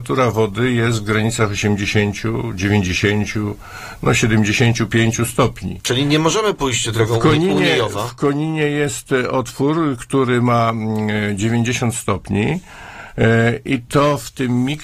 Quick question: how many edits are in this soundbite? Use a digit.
0